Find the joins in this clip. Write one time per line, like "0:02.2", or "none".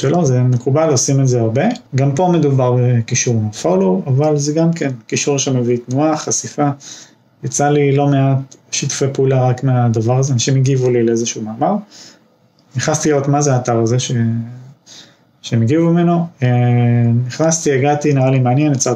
0:01.9